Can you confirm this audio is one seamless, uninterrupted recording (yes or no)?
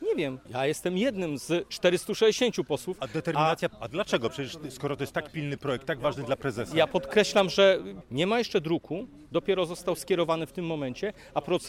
no